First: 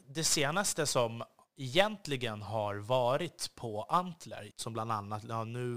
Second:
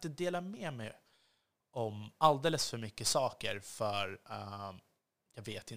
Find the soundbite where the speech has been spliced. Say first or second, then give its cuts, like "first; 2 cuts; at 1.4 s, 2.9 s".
first; 1 cut; at 4.5 s